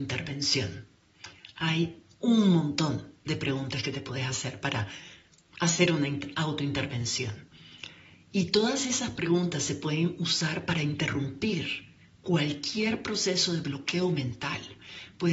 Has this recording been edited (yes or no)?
no